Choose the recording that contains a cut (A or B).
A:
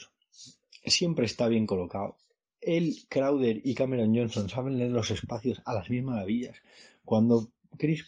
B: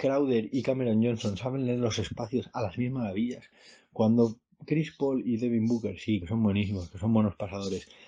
B